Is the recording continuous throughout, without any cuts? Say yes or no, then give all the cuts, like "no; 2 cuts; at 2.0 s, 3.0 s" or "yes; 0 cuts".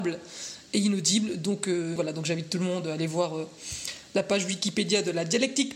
no; 1 cut; at 2.0 s